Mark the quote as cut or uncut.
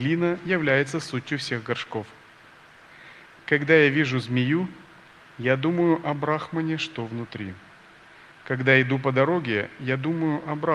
uncut